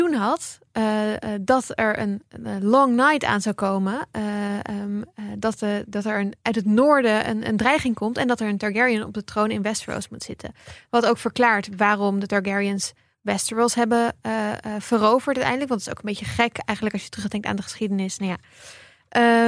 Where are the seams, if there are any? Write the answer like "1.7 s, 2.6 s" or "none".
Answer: none